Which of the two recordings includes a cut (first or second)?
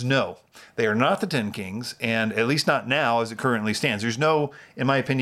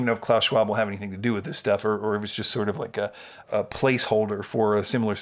second